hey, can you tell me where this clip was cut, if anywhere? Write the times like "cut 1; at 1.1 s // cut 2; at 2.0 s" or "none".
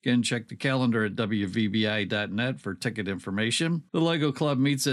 cut 1; at 3.9 s